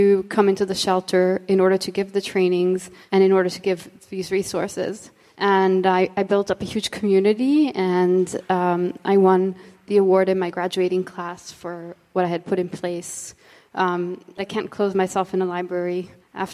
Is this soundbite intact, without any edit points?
no; 1 cut; at 14.4 s

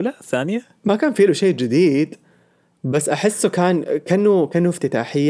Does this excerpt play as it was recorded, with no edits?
yes; 0 cuts

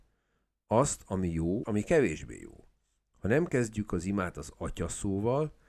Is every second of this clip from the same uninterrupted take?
no; 1 cut; at 1.6 s

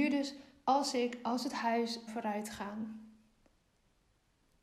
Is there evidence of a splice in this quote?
yes; 1 cut; at 2.1 s

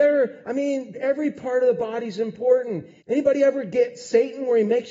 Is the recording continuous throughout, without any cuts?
no; 2 cuts; at 0.9 s, 3.0 s

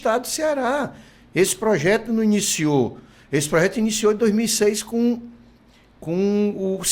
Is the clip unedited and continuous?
yes; 0 cuts

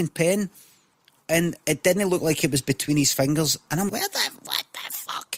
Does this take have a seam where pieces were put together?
yes; 1 cut; at 3.9 s

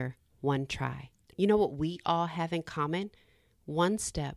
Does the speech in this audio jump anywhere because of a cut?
yes; 1 cut; at 1.3 s

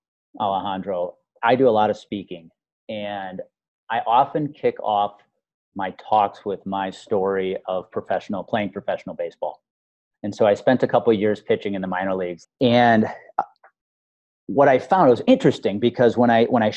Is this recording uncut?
no; 1 cut; at 12.4 s

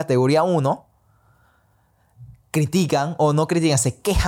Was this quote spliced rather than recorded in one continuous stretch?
no; 0 cuts

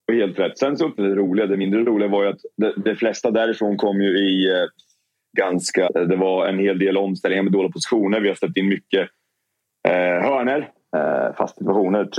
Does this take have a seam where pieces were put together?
yes; 2 cuts; at 1.0 s, 5.9 s

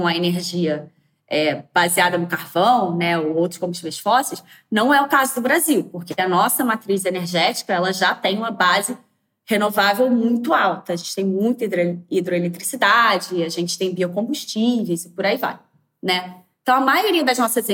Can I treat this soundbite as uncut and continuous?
yes; 0 cuts

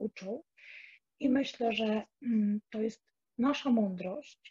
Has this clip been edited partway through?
no; 0 cuts

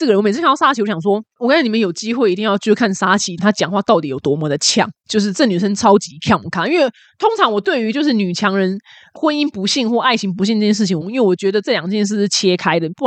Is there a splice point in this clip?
yes; 3 cuts; at 1.4 s, 3.4 s, 11.0 s

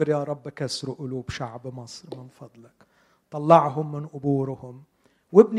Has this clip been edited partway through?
no; 0 cuts

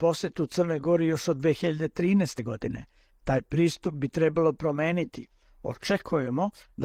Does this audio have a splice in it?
no; 0 cuts

